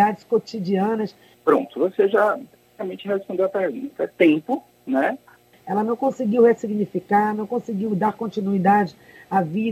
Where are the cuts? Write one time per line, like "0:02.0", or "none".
0:01.3
0:05.5